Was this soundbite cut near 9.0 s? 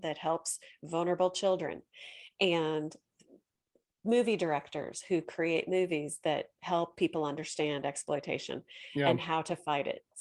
no; 0 cuts

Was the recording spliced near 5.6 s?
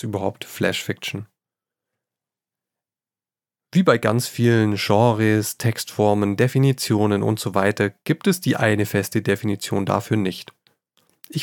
no; 0 cuts

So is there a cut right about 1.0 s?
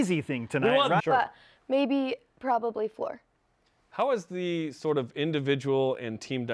yes; 1 cut; at 1.0 s

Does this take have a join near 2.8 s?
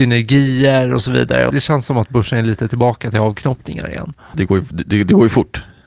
no; 2 cuts; at 1.5 s, 4.3 s

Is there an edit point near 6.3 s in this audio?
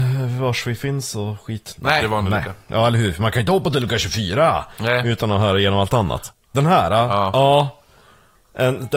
yes; 2 cuts; at 2.0 s, 6.3 s

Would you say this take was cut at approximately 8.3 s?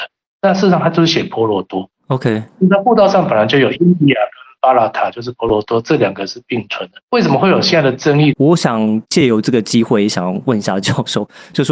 yes; 2 cuts; at 7.0 s, 8.3 s

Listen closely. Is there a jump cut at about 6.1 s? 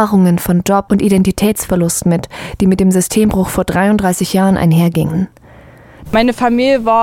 yes; 1 cut; at 6.1 s

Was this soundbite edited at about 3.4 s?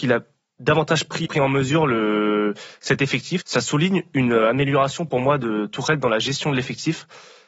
yes; 2 cuts; at 1.2 s, 3.4 s

